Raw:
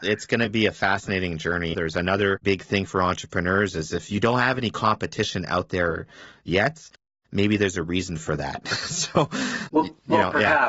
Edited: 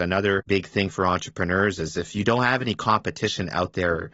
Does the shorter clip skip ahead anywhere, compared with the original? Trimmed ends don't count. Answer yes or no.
no